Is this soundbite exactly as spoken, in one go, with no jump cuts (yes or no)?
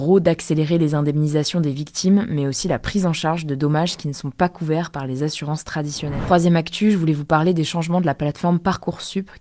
yes